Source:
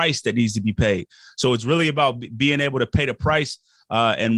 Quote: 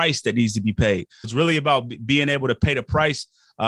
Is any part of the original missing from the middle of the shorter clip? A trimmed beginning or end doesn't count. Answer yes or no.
yes